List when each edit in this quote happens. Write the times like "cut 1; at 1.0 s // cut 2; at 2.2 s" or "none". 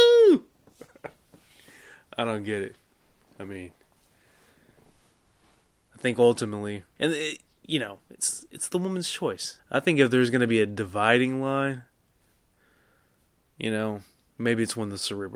cut 1; at 7.0 s // cut 2; at 9.6 s